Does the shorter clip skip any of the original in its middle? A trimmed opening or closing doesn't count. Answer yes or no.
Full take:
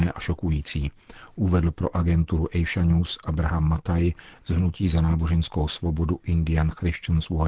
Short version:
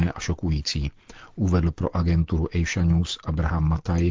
no